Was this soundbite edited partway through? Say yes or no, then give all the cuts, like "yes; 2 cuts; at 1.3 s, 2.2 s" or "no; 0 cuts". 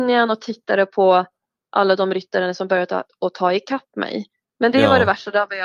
yes; 1 cut; at 4.4 s